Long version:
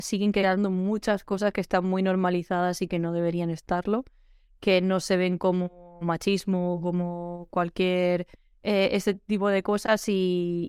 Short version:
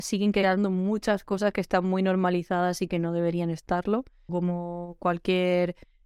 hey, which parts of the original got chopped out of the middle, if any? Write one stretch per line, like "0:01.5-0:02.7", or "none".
0:04.3-0:06.8